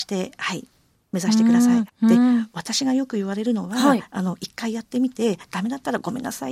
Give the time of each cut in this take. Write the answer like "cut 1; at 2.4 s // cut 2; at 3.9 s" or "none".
cut 1; at 1.9 s